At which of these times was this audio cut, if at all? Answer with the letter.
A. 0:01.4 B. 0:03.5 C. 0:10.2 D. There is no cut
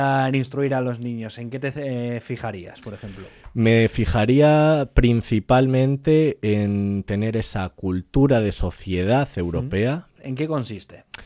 C